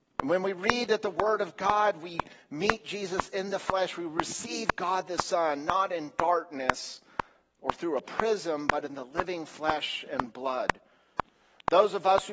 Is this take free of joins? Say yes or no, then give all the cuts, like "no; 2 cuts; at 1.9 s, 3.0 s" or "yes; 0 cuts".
yes; 0 cuts